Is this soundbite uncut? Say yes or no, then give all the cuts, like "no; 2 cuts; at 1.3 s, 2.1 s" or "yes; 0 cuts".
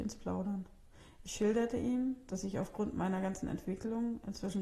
yes; 0 cuts